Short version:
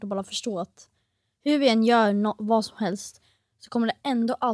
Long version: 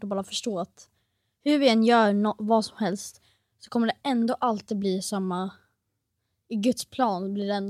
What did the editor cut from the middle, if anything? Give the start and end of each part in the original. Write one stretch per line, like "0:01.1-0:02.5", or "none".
none